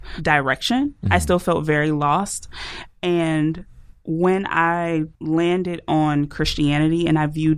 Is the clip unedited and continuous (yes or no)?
no